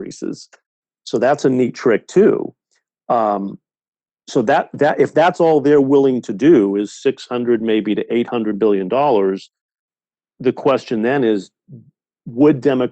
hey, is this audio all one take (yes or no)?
yes